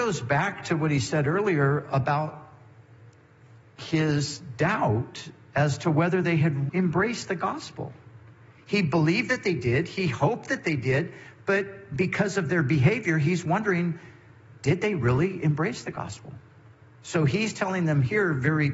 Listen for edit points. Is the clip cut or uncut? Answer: cut